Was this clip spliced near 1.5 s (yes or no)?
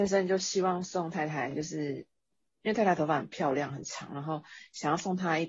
no